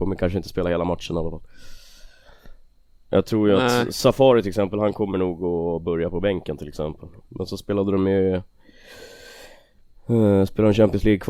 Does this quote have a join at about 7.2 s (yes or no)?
yes